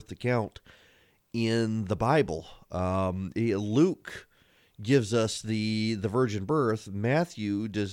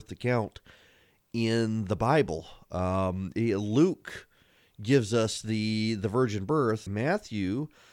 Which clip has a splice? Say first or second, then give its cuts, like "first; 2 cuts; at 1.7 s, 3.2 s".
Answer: second; 1 cut; at 6.9 s